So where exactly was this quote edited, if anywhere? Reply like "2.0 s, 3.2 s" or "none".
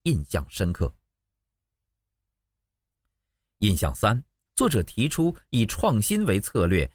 4.5 s